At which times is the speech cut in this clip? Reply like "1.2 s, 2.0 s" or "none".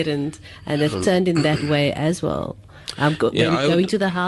none